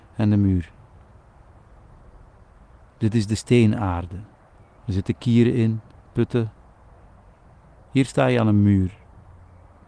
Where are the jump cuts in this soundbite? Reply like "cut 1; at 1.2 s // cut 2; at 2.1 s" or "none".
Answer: cut 1; at 4.8 s // cut 2; at 7.8 s

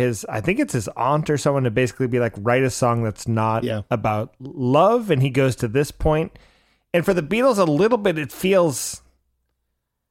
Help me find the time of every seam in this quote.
none

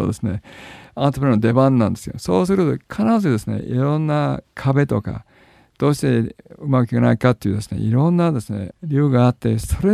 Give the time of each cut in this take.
none

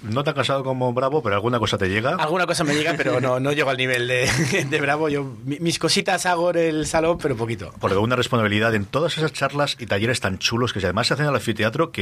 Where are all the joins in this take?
none

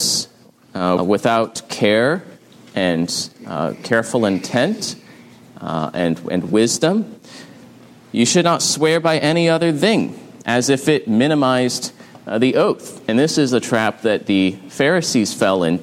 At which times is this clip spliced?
cut 1; at 1.0 s

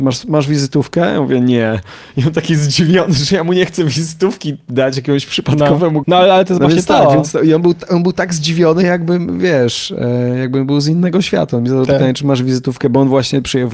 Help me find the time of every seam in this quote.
cut 1; at 6.0 s

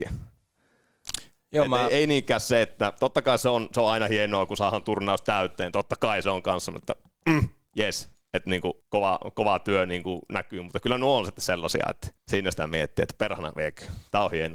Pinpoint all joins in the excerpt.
cut 1; at 8.8 s // cut 2; at 12.2 s

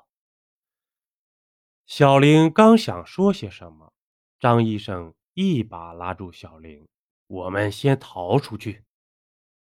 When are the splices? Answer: cut 1; at 7.1 s

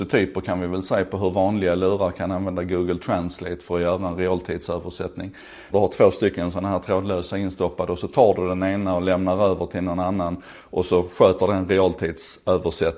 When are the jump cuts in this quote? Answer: cut 1; at 5.7 s

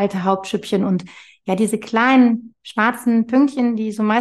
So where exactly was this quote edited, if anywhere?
none

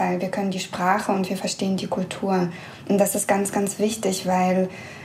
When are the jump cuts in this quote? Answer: none

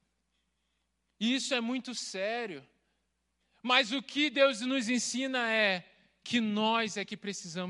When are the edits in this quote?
none

